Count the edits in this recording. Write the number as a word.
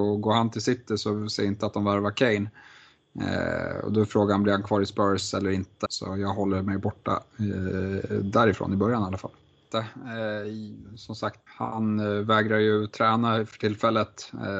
three